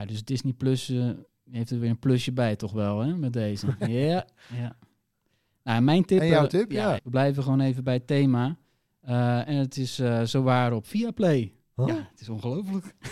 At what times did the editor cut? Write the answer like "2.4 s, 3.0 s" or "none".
7.0 s

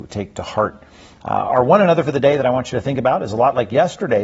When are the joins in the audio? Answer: 1.2 s

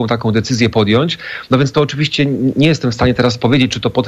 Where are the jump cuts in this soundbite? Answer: none

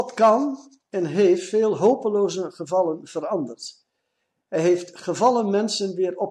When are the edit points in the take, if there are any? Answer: none

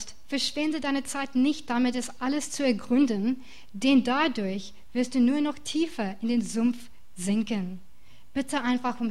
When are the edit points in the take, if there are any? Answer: none

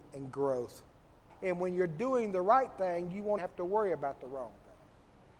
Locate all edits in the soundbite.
1.3 s, 3.4 s

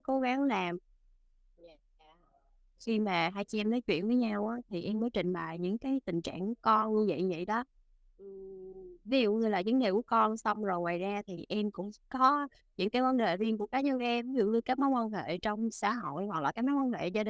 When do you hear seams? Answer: 2.8 s, 12.7 s

